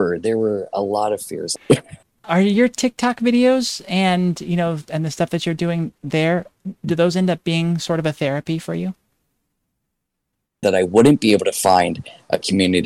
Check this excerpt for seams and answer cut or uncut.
cut